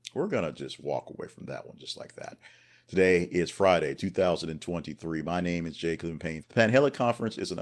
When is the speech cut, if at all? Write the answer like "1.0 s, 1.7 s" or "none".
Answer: 4.0 s, 6.4 s